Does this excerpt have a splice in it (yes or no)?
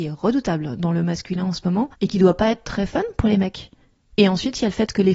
yes